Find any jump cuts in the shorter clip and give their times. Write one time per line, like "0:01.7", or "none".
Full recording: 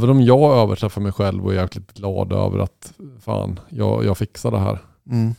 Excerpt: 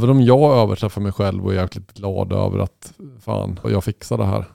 0:03.6